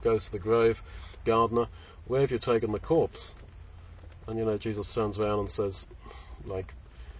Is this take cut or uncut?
cut